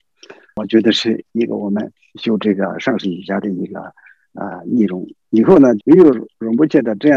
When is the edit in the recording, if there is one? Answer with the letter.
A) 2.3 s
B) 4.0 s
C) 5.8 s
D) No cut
C